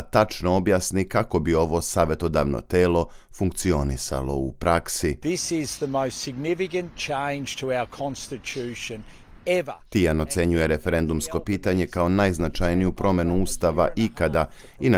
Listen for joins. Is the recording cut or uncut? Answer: uncut